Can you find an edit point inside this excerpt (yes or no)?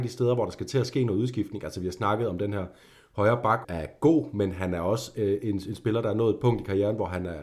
yes